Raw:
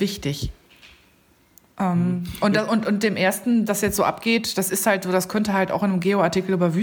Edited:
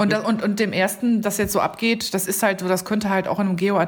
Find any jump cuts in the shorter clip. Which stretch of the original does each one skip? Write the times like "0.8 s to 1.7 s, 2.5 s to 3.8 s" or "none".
none